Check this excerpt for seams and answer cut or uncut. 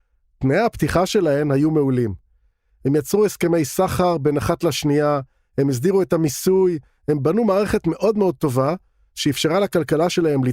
uncut